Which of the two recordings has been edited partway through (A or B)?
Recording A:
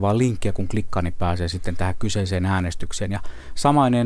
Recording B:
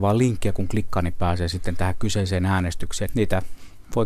B